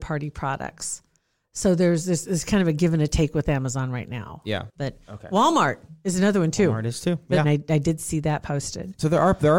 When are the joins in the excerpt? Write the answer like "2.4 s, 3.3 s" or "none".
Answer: 4.7 s, 7.4 s